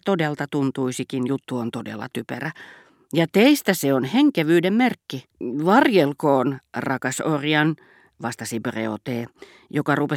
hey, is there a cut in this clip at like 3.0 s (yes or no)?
no